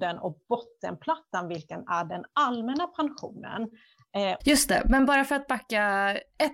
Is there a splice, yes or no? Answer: yes